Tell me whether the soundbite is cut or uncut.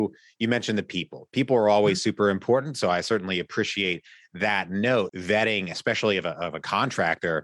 cut